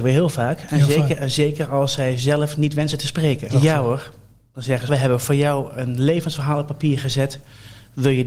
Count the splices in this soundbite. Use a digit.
2